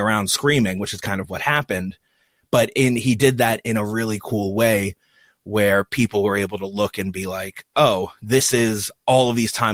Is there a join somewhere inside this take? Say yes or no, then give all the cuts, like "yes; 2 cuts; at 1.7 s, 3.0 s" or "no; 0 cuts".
no; 0 cuts